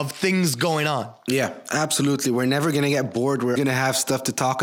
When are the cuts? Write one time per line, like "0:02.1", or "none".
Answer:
0:03.6